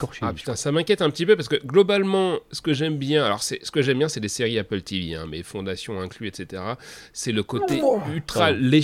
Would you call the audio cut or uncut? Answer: uncut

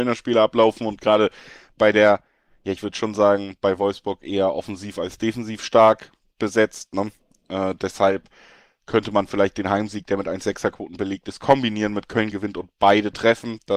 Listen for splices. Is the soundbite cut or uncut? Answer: uncut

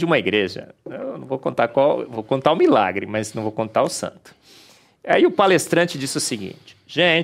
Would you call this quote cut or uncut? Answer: uncut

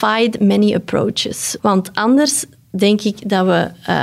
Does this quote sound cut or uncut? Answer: cut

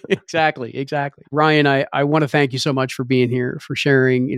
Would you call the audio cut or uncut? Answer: cut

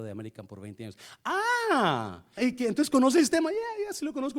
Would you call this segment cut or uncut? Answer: cut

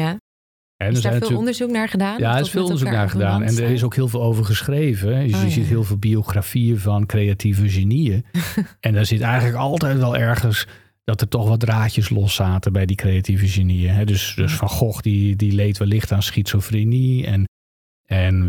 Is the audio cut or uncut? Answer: uncut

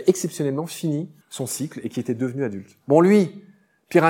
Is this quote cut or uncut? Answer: cut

